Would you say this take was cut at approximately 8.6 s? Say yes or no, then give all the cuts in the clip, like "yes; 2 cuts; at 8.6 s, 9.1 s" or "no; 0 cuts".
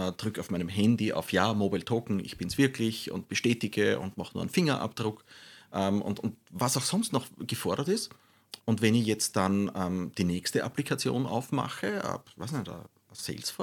yes; 1 cut; at 8.6 s